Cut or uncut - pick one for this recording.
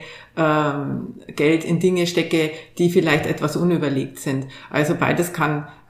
uncut